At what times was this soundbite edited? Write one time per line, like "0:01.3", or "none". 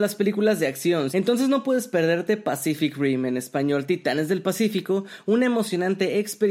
0:01.1